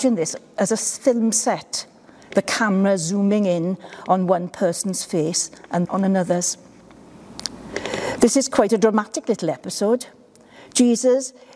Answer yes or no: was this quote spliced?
yes